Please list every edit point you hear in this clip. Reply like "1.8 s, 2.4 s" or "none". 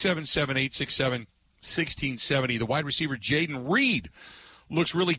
none

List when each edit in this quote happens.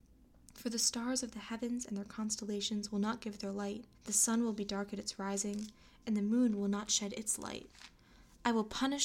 3.9 s

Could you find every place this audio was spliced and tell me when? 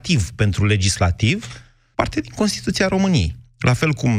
1.9 s

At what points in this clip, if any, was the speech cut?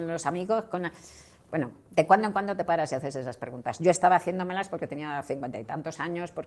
none

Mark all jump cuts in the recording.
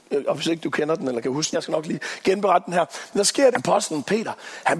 1.5 s, 3.5 s

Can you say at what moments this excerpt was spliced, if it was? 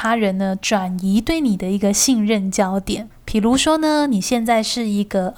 3.1 s

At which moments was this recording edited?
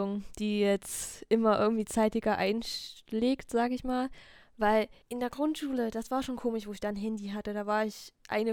5.0 s

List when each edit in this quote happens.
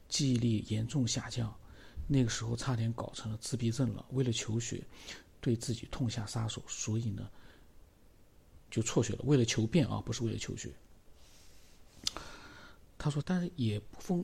8.6 s, 13.2 s

